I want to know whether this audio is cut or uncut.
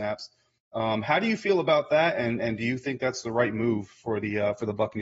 uncut